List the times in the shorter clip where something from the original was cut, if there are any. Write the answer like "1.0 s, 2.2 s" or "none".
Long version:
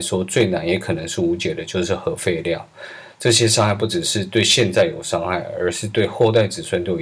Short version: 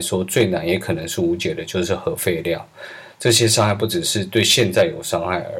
none